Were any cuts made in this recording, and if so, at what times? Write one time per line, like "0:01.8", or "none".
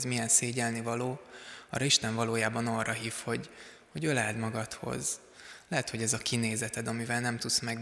none